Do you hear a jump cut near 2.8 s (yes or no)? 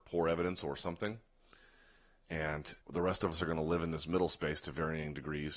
yes